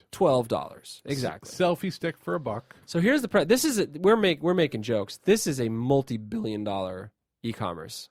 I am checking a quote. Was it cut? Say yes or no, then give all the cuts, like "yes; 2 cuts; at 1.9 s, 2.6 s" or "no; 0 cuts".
no; 0 cuts